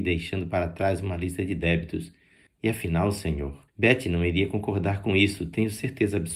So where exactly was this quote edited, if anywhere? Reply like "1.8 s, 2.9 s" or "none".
2.5 s, 3.7 s